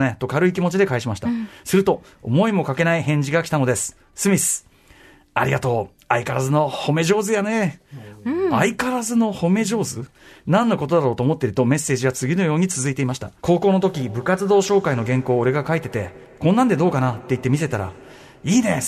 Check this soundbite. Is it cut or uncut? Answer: cut